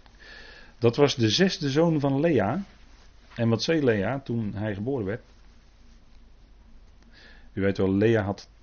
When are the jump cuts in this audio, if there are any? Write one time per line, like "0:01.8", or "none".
none